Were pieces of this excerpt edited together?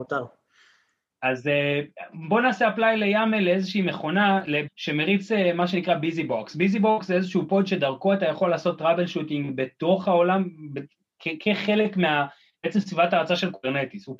yes; 1 cut; at 4.7 s

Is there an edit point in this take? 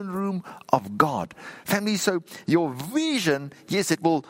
no; 0 cuts

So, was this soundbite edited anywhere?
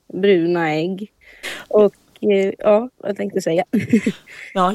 yes; 1 cut; at 1.4 s

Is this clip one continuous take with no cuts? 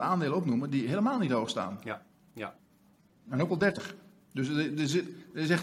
yes; 0 cuts

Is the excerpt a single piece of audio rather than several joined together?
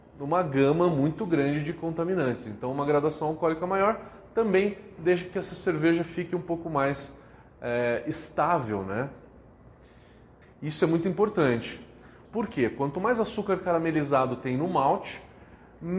no; 2 cuts; at 10.4 s, 12.2 s

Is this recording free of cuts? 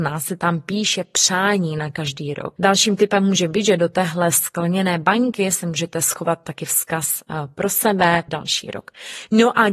no; 2 cuts; at 2.6 s, 8.3 s

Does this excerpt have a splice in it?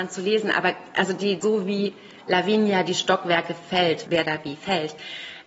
yes; 2 cuts; at 1.4 s, 4.1 s

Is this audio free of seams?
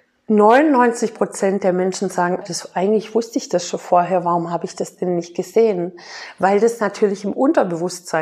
no; 1 cut; at 2.4 s

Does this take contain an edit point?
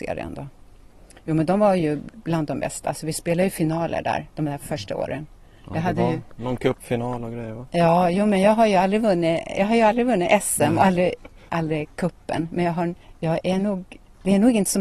yes; 1 cut; at 11.5 s

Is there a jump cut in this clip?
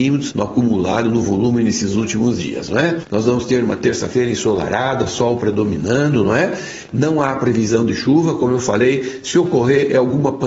yes; 2 cuts; at 3.0 s, 6.9 s

